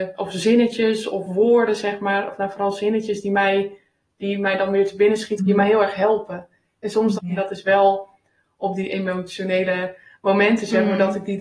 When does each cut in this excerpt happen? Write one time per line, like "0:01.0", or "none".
0:05.4
0:07.2